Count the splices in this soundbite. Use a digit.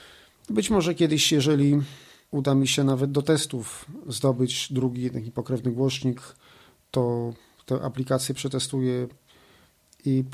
0